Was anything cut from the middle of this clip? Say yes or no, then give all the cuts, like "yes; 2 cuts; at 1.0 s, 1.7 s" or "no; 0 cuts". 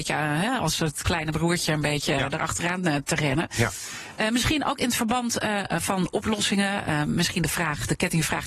no; 0 cuts